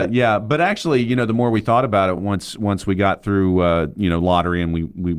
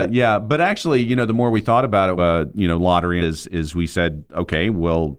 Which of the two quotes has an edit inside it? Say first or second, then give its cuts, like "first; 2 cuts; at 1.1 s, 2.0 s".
second; 2 cuts; at 2.2 s, 3.2 s